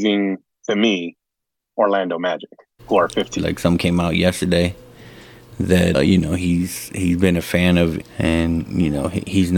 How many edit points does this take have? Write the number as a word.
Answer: three